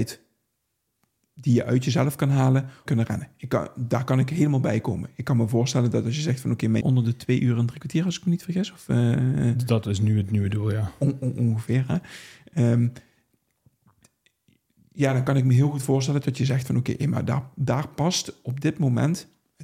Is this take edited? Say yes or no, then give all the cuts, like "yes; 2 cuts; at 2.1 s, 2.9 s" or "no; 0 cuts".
yes; 2 cuts; at 2.9 s, 6.8 s